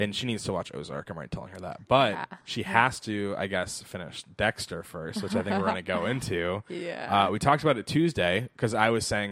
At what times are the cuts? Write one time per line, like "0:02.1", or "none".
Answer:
0:02.4